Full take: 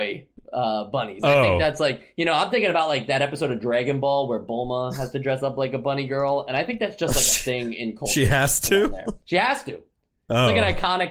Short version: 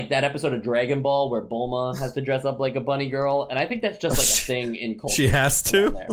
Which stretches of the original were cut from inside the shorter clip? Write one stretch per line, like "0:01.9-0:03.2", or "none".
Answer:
none

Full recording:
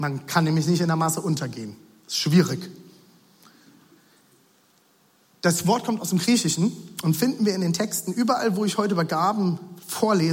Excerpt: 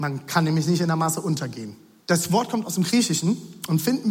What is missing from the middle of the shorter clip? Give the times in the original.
0:02.0-0:05.3

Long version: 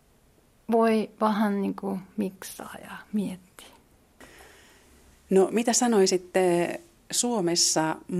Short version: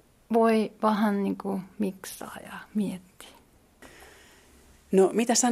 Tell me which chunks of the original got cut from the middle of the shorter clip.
none

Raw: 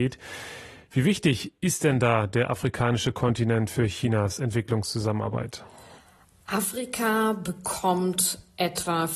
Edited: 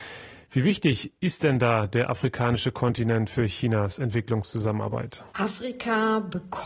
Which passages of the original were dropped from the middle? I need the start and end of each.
0:05.7-0:06.4

